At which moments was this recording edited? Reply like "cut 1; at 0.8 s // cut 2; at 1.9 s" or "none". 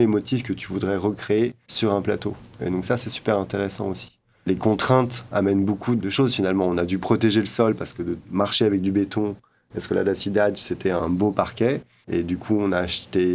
none